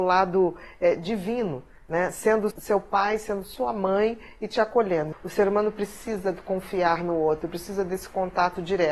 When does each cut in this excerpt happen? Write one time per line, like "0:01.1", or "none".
0:02.5
0:05.1